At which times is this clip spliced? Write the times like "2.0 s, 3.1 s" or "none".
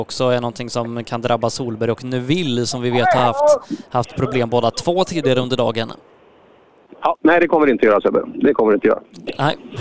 none

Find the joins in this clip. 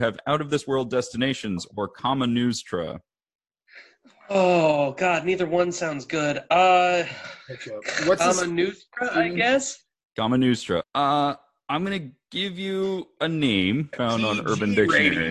10.8 s, 13.9 s

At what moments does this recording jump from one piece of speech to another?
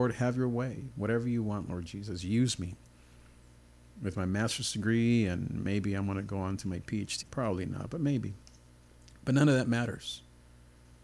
7.2 s

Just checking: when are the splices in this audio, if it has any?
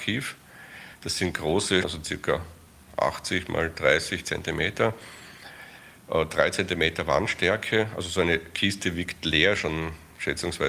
1.8 s

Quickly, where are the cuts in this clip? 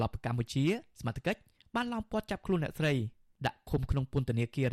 none

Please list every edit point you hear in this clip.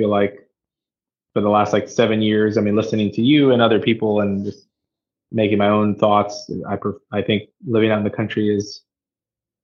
none

